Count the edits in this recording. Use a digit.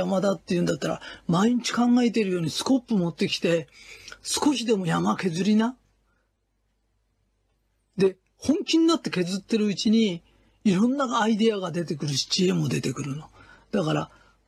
0